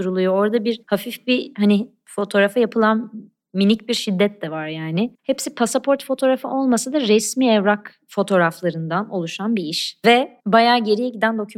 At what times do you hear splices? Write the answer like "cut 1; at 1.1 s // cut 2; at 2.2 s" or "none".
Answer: cut 1; at 5.2 s